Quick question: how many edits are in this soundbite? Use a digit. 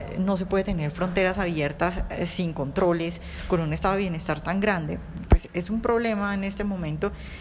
0